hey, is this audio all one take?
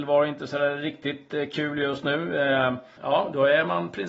no; 1 cut; at 3.0 s

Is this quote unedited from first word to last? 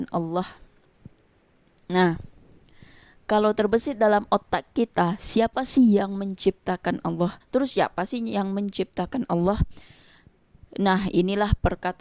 no; 1 cut; at 7.4 s

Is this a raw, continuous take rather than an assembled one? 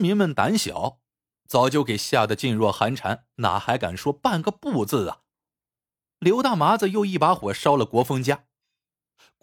no; 1 cut; at 3.3 s

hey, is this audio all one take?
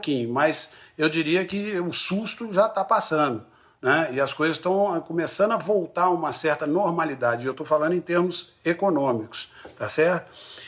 yes; 0 cuts

